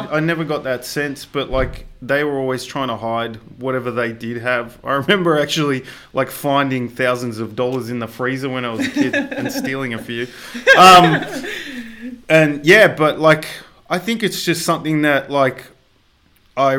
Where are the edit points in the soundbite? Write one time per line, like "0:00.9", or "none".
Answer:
none